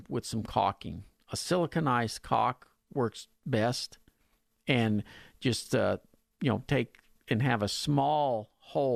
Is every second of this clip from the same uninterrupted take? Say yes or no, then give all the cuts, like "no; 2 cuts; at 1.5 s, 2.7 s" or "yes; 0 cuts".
yes; 0 cuts